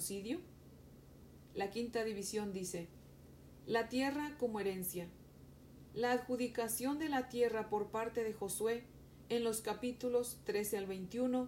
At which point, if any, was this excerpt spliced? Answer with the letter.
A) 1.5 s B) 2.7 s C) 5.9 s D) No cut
A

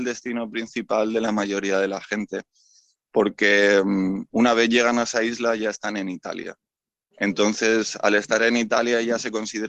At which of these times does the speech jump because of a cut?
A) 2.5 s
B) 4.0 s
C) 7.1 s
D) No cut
D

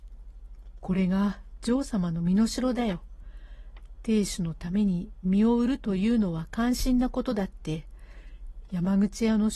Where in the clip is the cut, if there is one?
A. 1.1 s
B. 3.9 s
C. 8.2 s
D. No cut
D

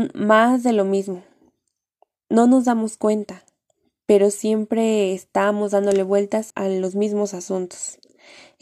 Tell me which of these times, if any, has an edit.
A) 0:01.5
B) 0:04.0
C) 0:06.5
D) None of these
C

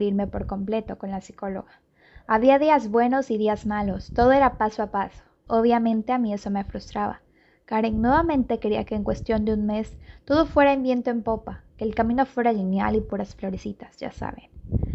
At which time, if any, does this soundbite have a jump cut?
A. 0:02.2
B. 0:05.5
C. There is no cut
B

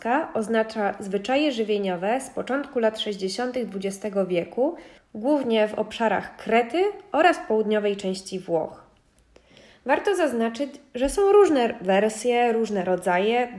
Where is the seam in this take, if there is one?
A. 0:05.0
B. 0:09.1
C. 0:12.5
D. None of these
A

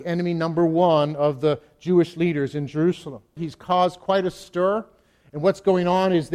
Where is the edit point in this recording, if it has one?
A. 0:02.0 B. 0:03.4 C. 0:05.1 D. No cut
B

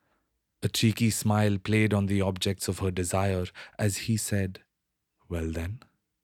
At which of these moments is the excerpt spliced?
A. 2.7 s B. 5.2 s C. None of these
C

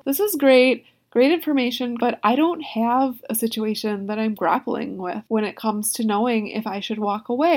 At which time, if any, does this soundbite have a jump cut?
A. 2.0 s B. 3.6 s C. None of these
A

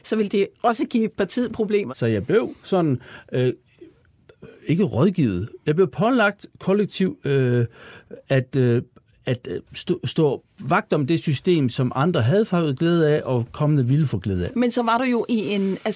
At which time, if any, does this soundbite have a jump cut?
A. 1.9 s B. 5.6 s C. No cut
A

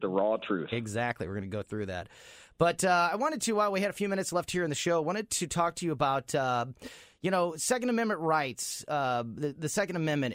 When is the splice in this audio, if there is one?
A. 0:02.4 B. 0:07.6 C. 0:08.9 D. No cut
D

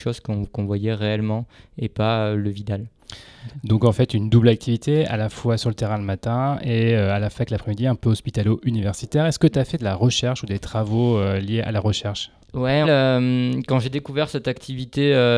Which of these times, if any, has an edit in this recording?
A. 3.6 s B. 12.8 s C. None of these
B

